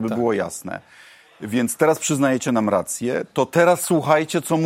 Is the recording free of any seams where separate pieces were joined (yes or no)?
yes